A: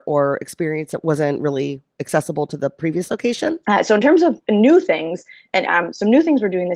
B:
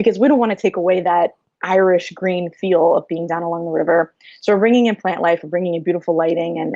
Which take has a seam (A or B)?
A